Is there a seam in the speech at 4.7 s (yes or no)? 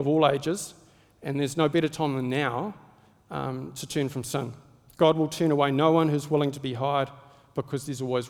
no